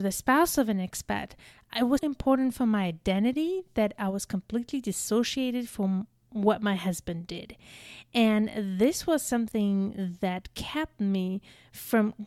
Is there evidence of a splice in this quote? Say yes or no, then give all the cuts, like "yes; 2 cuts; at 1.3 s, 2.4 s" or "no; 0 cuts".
yes; 1 cut; at 2.0 s